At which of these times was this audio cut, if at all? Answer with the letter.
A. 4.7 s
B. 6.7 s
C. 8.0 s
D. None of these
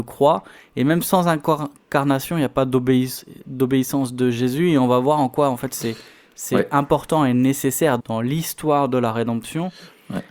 C